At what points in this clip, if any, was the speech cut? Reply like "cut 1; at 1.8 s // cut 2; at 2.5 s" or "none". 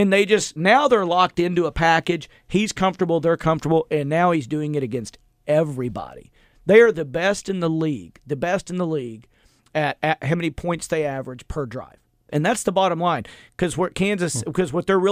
cut 1; at 12.3 s